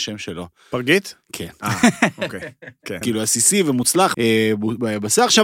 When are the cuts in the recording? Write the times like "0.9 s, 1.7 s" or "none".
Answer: 3.0 s, 4.1 s